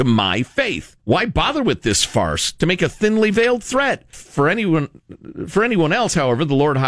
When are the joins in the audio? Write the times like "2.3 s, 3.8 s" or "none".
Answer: 1.0 s, 4.1 s